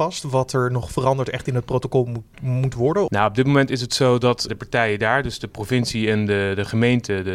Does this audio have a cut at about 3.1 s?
yes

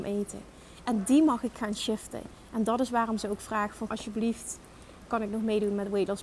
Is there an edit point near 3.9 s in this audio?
yes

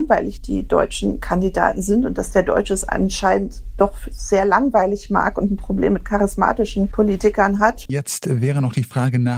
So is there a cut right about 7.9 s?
yes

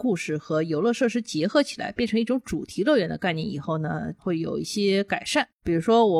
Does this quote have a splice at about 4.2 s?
yes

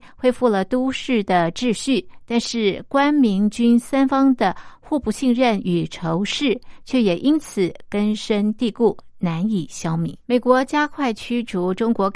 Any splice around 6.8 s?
no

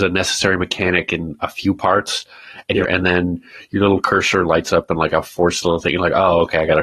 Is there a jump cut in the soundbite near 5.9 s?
no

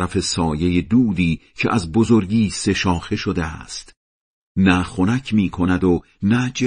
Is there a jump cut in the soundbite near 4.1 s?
no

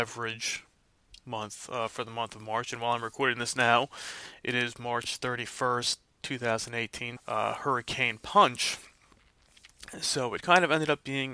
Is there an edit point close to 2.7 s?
no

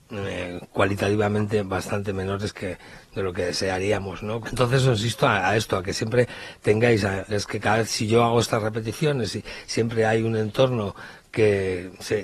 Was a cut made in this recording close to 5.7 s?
no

